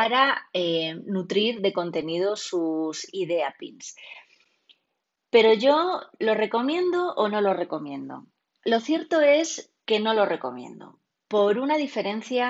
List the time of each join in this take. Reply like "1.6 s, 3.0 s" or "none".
none